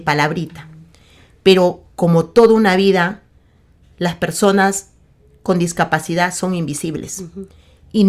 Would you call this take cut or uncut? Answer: uncut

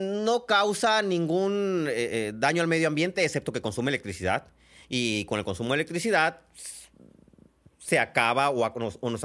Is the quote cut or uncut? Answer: uncut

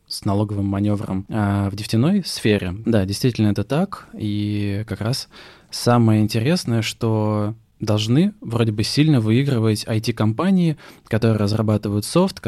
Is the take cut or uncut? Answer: cut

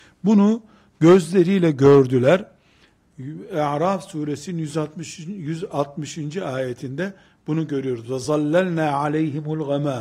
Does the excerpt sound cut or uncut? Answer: uncut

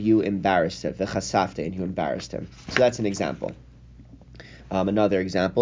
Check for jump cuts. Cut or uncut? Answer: uncut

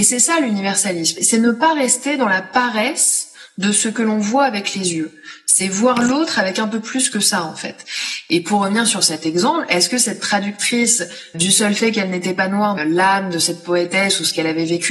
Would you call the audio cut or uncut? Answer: cut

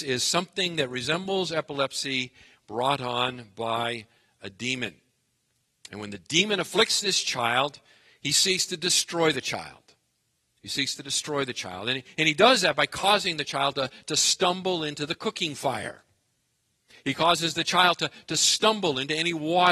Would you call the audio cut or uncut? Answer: uncut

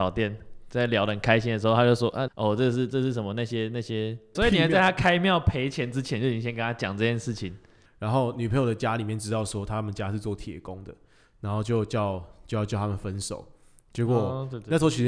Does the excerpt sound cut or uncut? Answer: cut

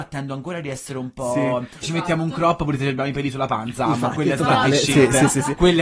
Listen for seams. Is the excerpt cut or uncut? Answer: cut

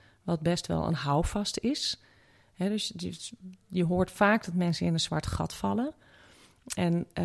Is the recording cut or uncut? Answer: uncut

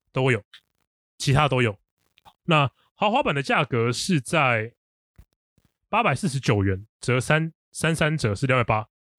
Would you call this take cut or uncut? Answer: uncut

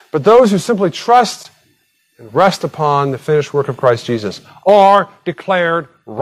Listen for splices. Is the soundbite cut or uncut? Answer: uncut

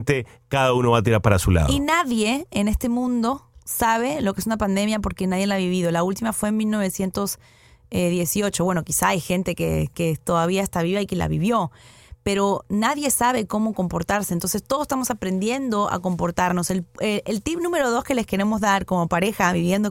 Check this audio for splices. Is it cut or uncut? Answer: uncut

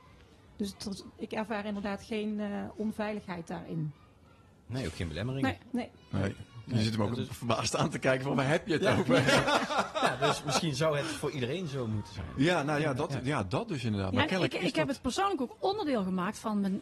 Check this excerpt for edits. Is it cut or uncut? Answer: uncut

